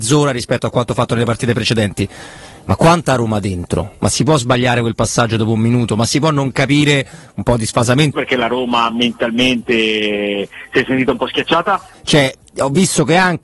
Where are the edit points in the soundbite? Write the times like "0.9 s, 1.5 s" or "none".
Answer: 8.1 s, 11.9 s